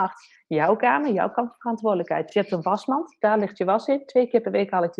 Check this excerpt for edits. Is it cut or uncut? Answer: uncut